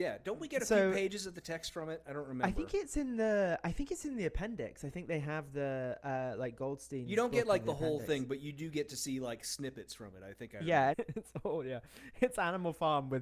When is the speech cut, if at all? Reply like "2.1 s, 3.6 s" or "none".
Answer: 10.9 s